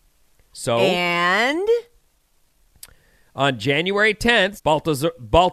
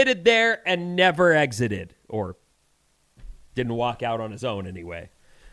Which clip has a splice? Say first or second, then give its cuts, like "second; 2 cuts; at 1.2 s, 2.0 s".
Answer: first; 1 cut; at 4.6 s